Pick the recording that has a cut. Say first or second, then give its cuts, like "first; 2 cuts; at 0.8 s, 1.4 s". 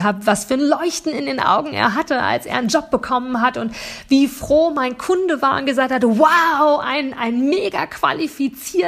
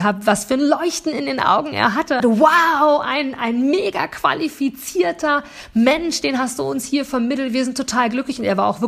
second; 1 cut; at 2.2 s